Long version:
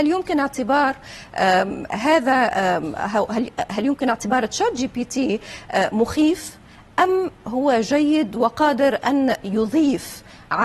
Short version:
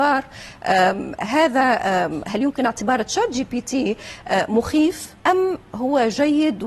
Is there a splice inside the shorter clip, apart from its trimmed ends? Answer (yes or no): yes